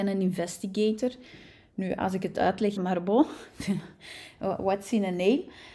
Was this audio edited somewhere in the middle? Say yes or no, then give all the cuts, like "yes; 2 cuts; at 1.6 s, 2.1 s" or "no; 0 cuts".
yes; 1 cut; at 2.8 s